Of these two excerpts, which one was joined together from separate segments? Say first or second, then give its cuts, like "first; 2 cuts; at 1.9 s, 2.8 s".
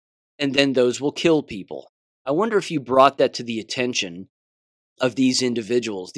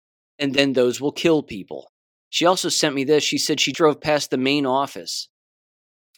second; 2 cuts; at 2.2 s, 3.7 s